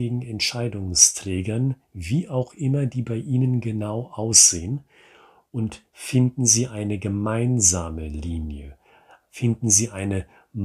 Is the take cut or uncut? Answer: uncut